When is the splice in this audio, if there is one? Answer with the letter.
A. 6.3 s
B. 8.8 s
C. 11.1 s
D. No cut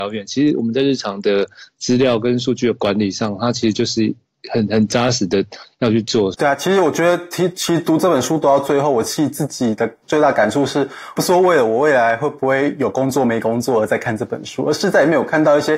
A